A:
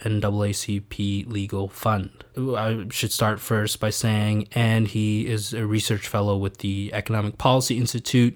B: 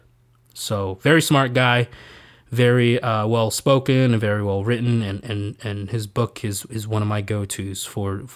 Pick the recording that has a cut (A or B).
A